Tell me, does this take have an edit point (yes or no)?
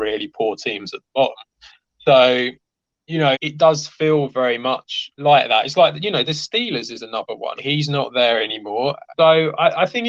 yes